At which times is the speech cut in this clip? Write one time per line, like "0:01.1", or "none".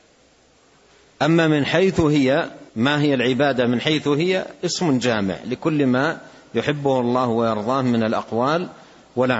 0:02.7